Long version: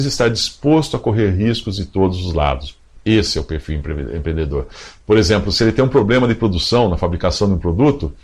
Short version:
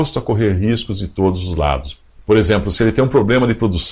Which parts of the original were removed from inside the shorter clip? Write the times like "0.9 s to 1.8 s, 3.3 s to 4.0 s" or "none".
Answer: 3.0 s to 5.0 s